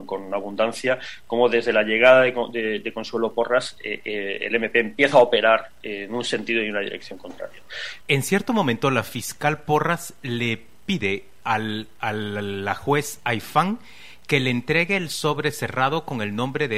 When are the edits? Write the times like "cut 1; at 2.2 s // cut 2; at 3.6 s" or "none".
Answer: cut 1; at 8.0 s